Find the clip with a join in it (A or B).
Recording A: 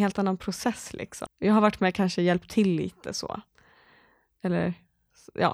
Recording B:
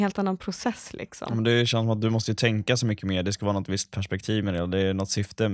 A